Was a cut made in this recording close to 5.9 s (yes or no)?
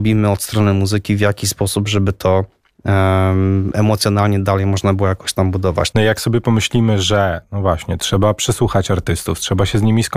yes